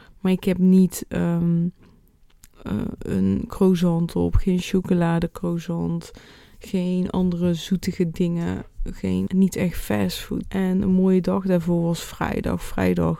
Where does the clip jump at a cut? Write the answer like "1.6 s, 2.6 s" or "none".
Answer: 9.3 s, 10.4 s